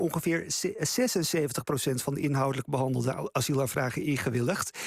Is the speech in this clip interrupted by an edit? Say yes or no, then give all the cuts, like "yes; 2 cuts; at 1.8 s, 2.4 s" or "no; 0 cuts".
no; 0 cuts